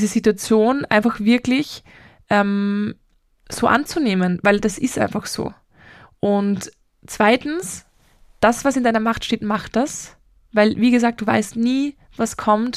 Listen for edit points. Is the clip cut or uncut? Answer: uncut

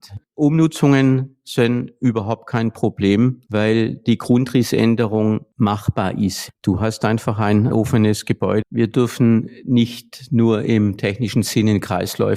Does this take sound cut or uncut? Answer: cut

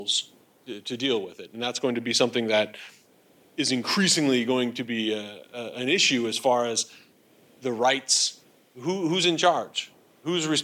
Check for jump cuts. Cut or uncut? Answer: uncut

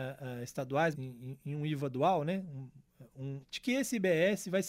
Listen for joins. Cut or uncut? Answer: cut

